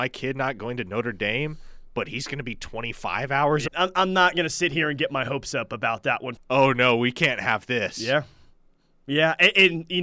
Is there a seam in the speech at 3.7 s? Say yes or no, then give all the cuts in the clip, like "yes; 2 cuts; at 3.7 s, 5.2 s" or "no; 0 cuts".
yes; 2 cuts; at 3.7 s, 6.4 s